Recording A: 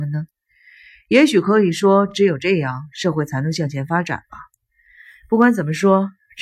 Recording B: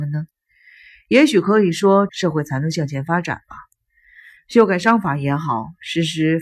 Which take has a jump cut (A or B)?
B